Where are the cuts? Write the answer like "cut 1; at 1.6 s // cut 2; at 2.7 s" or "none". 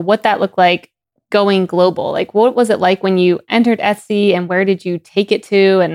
none